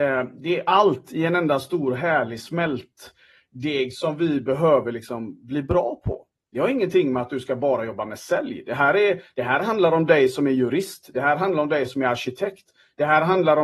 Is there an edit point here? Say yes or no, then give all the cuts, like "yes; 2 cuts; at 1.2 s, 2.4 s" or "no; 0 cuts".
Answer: no; 0 cuts